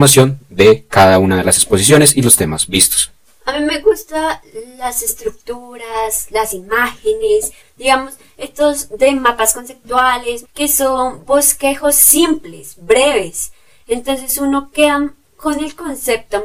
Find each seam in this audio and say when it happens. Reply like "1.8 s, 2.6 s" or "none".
7.6 s, 10.4 s